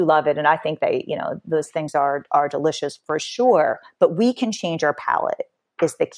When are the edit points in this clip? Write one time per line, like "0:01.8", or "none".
none